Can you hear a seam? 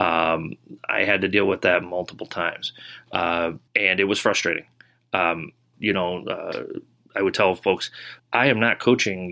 yes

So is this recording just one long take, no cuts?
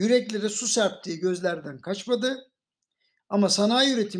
yes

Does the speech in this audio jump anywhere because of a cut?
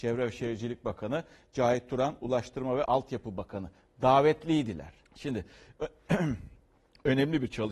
yes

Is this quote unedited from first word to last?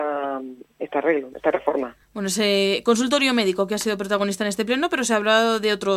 yes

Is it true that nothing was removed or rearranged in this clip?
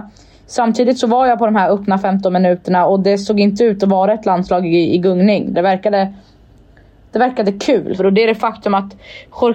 no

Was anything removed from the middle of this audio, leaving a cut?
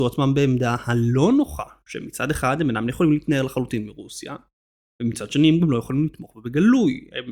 no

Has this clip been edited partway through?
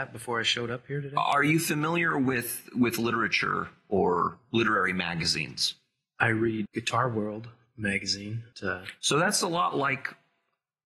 yes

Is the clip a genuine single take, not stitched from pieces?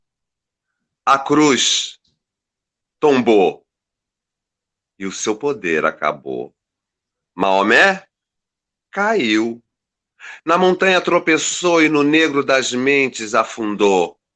yes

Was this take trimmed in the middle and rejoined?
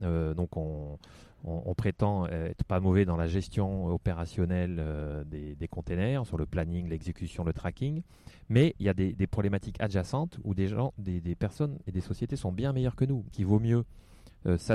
yes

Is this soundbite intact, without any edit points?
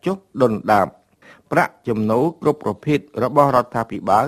yes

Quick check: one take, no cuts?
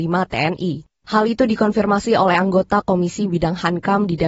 yes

